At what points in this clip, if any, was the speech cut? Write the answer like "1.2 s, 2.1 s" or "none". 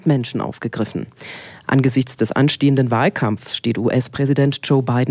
none